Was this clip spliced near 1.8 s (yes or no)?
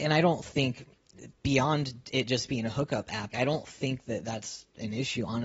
no